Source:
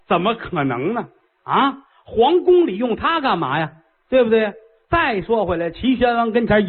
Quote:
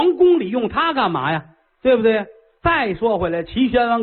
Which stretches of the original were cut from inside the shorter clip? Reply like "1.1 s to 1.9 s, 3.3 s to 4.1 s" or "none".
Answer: none